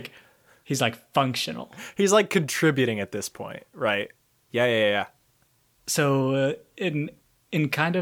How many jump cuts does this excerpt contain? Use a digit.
1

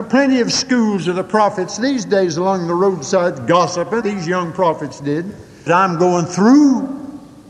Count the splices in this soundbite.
2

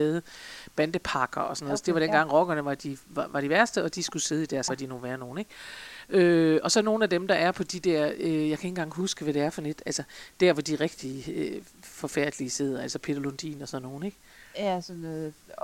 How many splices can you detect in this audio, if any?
1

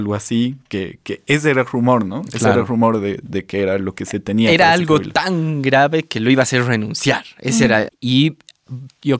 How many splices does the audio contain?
1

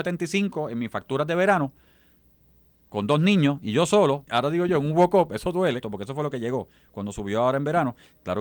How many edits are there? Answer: 2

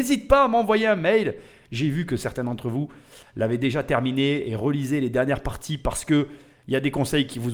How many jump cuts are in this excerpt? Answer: 0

